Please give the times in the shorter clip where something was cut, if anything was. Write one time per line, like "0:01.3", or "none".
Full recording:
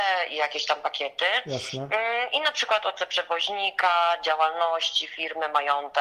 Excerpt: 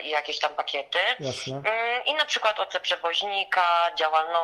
none